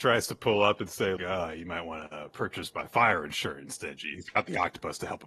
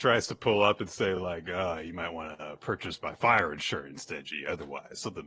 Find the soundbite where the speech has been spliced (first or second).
first